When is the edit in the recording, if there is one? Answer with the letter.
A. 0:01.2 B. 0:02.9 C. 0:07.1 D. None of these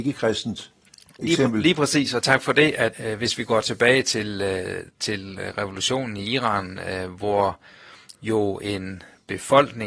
B